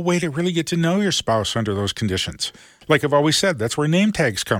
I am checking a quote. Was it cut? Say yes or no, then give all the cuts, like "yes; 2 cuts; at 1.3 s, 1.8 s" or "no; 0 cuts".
yes; 1 cut; at 2.8 s